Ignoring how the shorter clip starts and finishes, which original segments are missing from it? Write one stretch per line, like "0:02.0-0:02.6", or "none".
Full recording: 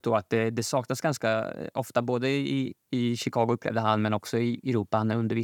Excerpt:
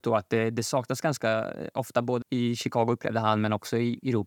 0:02.2-0:02.8